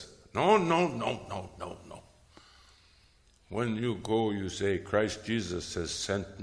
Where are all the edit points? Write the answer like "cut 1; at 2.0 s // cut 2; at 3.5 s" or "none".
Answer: none